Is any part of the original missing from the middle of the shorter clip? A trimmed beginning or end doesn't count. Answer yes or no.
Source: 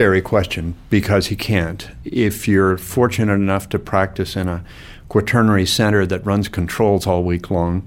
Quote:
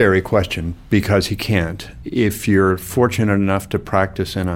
no